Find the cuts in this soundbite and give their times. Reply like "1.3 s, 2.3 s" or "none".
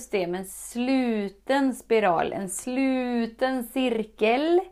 none